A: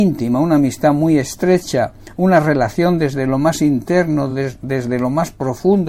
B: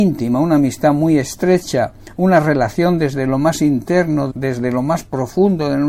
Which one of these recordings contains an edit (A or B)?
B